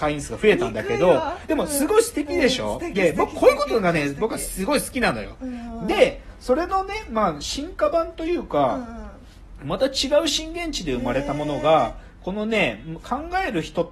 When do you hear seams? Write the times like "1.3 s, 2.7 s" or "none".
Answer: none